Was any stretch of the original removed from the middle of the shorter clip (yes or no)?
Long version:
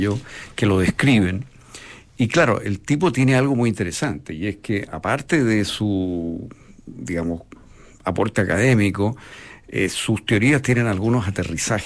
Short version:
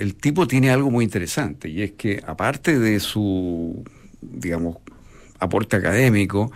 no